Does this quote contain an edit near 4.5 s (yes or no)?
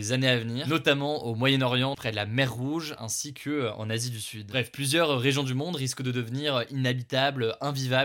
no